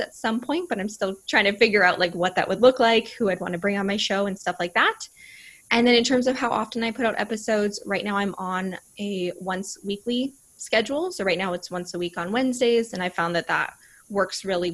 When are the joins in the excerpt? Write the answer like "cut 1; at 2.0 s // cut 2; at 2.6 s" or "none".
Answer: none